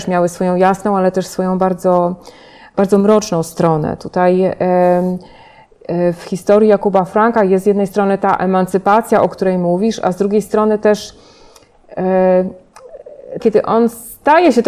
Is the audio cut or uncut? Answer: cut